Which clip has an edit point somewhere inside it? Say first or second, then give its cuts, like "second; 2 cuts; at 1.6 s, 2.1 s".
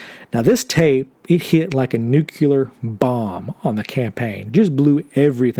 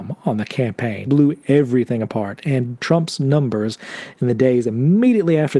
second; 1 cut; at 1.1 s